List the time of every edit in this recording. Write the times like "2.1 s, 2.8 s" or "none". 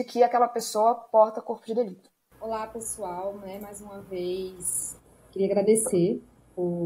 none